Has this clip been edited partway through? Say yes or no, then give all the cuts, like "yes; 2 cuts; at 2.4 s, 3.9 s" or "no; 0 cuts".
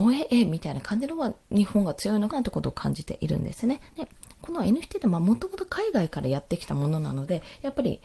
yes; 2 cuts; at 2.3 s, 3.9 s